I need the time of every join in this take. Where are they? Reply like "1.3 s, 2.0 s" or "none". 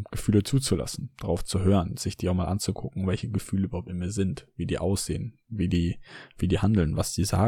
none

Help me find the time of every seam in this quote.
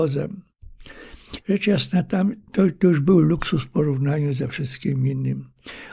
1.4 s

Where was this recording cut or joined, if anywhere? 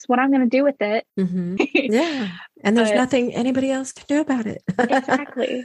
1.6 s

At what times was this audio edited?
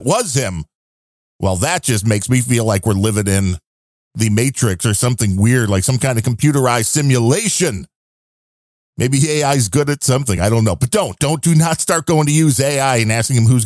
none

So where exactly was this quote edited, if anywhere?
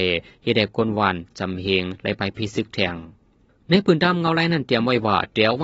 none

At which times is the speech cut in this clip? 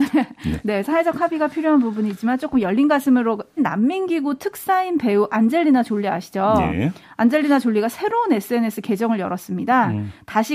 3.6 s

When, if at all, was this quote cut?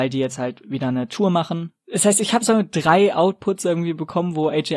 none

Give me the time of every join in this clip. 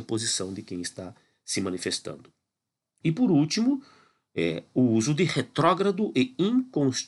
3.0 s

